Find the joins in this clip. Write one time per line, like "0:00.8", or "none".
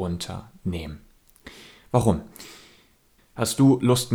0:03.2